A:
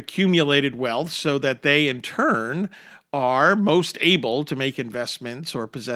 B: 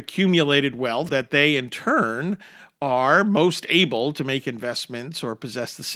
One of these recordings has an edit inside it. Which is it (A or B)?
B